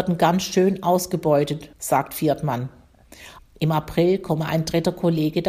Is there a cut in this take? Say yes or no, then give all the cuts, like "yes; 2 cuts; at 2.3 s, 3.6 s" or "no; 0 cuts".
yes; 2 cuts; at 1.7 s, 3.4 s